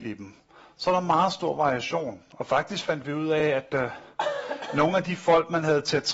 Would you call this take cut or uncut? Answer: uncut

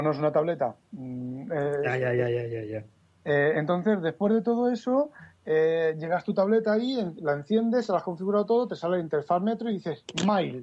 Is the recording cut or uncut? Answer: uncut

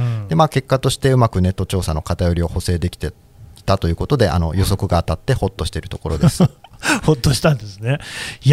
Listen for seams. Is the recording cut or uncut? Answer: uncut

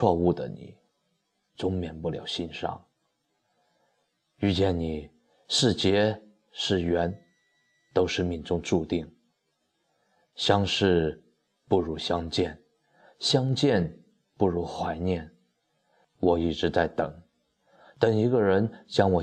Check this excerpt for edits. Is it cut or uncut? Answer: cut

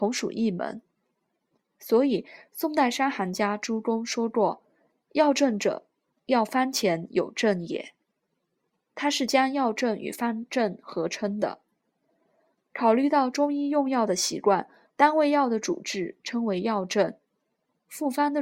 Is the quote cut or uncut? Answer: cut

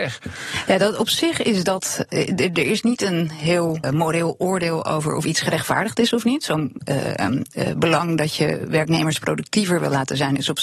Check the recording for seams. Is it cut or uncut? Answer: cut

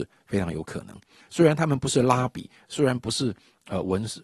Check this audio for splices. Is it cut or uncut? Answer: cut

